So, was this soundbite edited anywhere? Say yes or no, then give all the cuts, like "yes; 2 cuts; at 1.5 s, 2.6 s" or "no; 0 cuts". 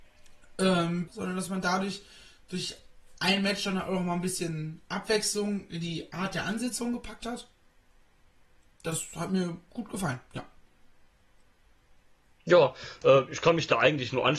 yes; 1 cut; at 1.1 s